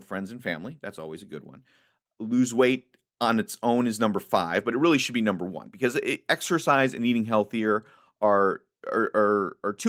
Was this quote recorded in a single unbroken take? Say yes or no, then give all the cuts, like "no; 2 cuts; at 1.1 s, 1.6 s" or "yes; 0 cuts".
yes; 0 cuts